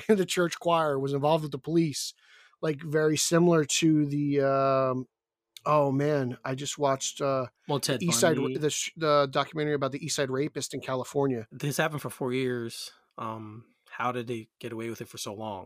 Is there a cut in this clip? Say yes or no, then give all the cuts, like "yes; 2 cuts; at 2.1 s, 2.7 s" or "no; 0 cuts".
yes; 1 cut; at 11.5 s